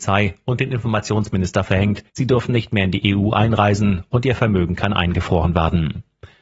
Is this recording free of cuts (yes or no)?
no